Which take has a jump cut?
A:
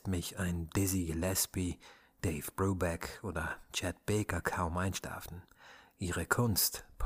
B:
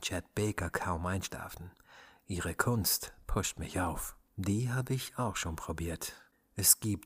B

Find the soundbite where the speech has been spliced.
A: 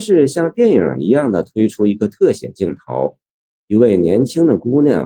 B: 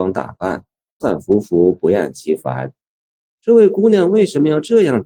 B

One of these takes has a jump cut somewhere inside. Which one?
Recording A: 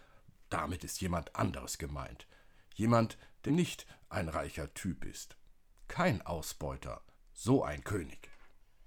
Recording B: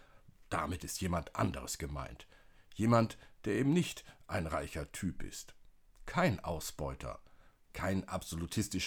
A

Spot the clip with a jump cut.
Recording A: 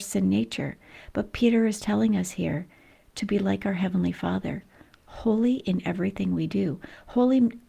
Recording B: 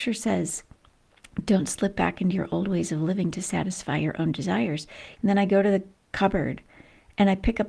B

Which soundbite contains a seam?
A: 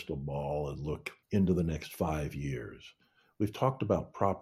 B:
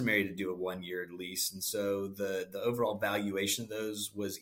A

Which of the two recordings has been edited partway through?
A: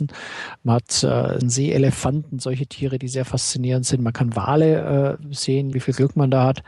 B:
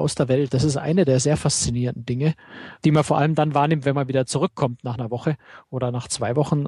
A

